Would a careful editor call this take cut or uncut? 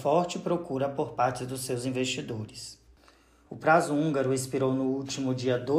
cut